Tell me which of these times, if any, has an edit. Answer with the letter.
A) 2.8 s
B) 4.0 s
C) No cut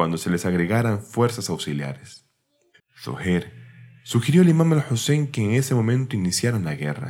A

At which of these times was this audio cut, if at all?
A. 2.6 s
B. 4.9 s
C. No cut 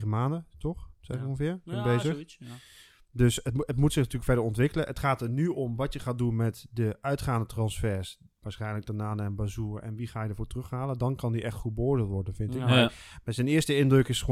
C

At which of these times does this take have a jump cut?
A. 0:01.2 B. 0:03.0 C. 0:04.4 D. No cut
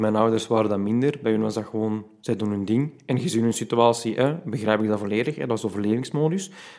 D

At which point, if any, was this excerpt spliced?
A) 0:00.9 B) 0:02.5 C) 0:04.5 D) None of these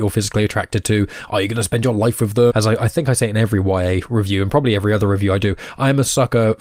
B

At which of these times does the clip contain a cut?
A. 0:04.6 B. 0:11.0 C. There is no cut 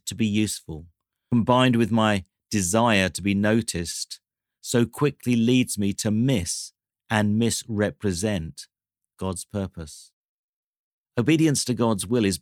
B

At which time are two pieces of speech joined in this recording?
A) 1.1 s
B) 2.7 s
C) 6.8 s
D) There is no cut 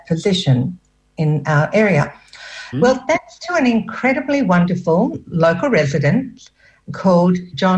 B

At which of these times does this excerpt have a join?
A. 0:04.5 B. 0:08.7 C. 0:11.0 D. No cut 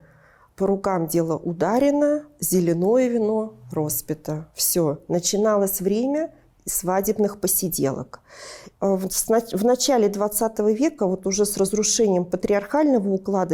B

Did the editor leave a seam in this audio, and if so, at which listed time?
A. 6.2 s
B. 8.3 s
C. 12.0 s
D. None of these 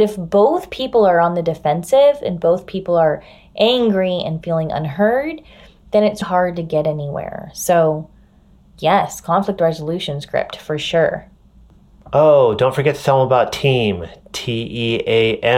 A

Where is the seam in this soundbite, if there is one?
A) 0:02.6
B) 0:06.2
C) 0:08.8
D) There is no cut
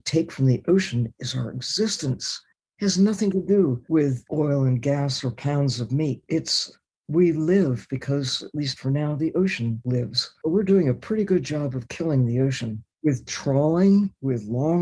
D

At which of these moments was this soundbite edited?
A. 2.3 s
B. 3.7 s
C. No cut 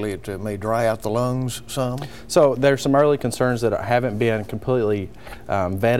C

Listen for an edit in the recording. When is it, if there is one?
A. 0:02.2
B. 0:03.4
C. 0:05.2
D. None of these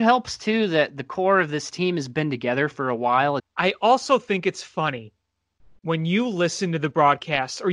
B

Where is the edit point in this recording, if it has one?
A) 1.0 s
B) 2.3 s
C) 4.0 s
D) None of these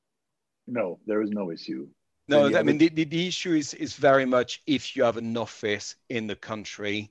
B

